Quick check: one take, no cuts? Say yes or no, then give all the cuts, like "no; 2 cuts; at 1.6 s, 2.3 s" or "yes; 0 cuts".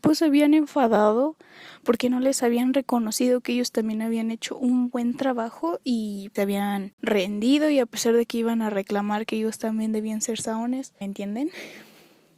no; 2 cuts; at 6.4 s, 11.0 s